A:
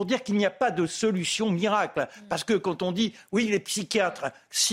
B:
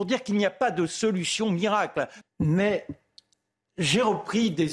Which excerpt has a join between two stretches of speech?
B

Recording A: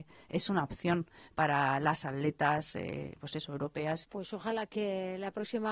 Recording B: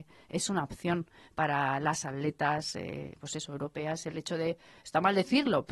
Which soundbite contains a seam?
A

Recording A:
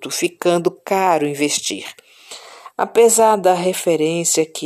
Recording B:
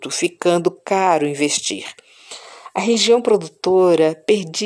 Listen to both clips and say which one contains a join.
A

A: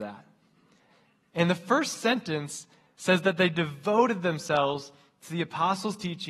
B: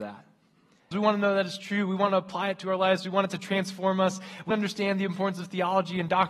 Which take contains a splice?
B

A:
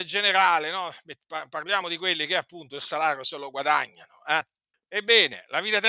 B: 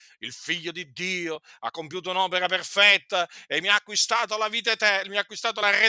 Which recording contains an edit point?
A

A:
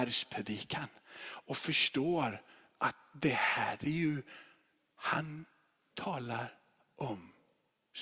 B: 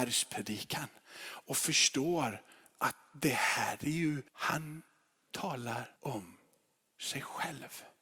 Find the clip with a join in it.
B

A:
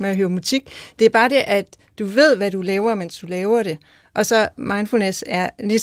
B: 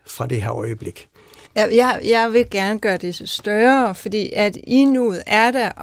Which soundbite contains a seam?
B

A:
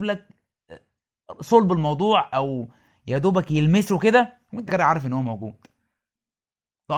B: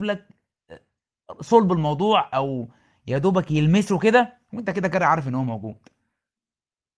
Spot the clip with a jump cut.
A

